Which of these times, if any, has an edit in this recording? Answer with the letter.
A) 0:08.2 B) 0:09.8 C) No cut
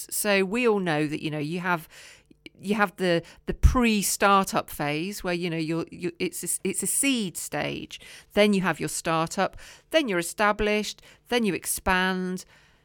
B